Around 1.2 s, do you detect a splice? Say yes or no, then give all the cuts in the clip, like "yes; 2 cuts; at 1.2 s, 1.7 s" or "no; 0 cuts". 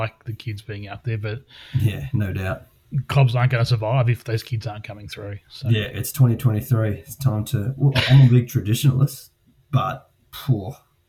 no; 0 cuts